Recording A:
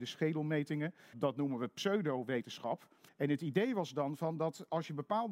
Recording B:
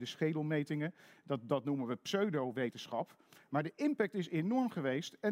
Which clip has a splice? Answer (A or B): A